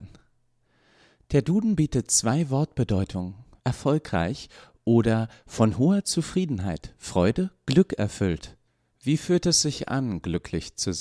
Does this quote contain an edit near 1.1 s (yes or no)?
no